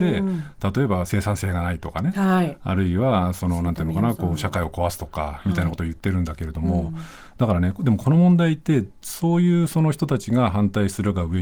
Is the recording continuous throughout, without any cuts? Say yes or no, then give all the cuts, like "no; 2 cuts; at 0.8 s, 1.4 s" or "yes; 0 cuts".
yes; 0 cuts